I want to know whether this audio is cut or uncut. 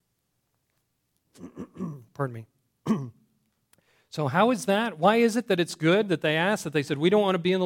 uncut